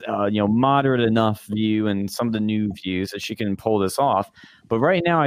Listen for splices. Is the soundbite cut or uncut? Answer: uncut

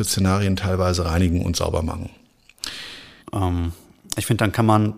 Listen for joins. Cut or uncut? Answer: cut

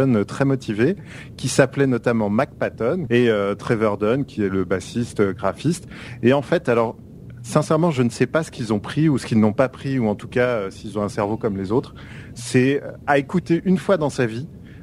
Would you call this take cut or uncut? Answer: cut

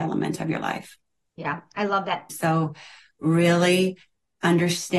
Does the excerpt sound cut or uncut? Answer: cut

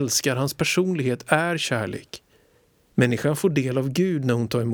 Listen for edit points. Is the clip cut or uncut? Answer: cut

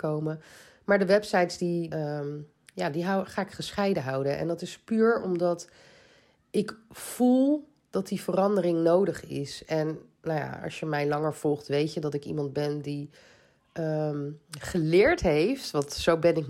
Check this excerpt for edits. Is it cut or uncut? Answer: cut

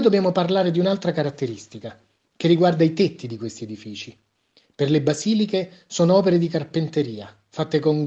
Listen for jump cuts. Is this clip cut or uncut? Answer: uncut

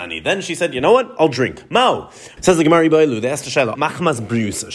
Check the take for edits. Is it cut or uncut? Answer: cut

